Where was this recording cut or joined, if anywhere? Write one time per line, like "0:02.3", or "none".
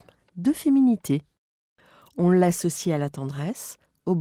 none

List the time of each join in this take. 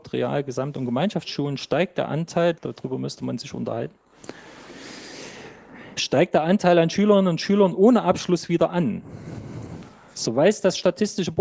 0:02.5

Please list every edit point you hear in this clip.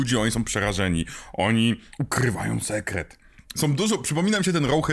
none

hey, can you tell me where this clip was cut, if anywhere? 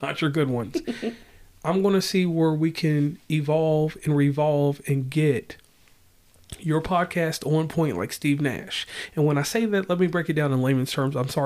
none

